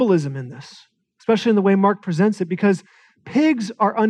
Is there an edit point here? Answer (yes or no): no